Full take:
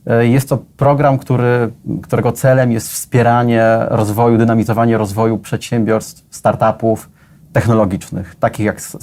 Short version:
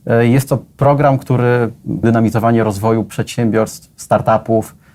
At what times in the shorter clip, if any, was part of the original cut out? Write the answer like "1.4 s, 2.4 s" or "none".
2.0 s